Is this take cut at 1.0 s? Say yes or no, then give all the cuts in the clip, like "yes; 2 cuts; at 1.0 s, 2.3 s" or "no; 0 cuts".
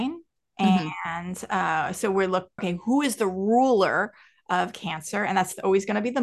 no; 1 cut; at 2.6 s